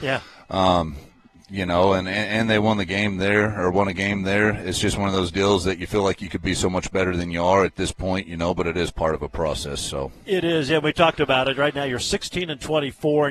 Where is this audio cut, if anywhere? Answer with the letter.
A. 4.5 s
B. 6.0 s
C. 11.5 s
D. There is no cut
D